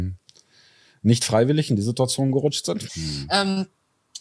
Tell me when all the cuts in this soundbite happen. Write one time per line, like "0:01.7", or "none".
0:02.9